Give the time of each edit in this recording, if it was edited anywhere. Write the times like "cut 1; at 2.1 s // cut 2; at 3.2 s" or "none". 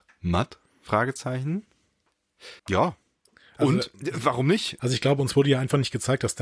cut 1; at 2.6 s // cut 2; at 4.8 s